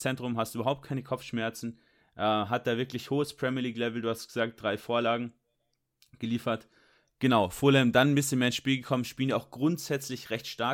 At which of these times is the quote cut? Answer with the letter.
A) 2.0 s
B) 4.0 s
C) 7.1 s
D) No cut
D